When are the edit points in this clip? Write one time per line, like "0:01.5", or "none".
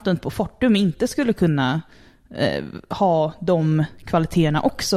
none